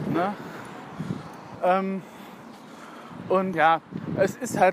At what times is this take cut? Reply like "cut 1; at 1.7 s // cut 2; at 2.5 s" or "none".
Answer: cut 1; at 1.5 s // cut 2; at 3.5 s